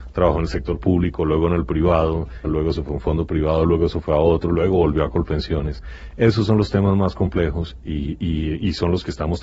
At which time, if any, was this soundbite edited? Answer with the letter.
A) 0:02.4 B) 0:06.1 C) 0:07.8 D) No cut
A